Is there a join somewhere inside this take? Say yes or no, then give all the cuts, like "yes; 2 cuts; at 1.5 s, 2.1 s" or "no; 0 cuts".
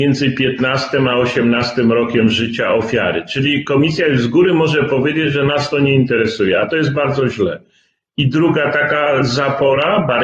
no; 0 cuts